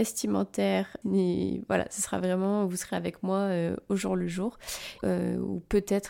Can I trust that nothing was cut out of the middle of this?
no; 2 cuts; at 1.0 s, 5.0 s

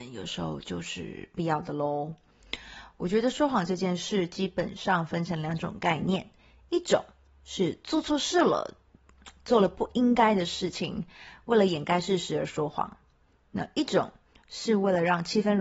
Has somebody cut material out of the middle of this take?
no; 0 cuts

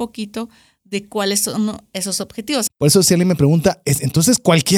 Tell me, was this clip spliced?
yes; 1 cut; at 2.7 s

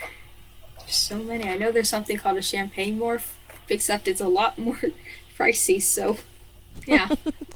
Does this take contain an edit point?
yes; 1 cut; at 3.7 s

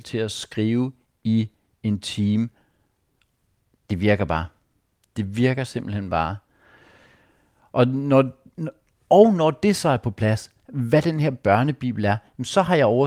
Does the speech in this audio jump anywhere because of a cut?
no; 0 cuts

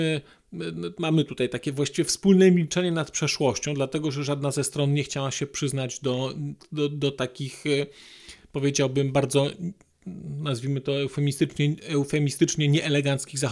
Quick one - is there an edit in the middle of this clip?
no; 0 cuts

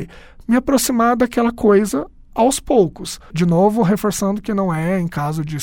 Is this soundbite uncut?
no; 1 cut; at 3.3 s

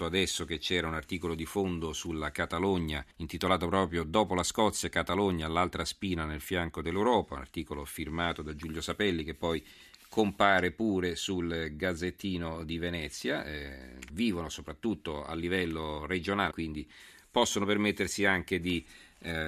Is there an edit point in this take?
yes; 3 cuts; at 3.1 s, 14.1 s, 16.5 s

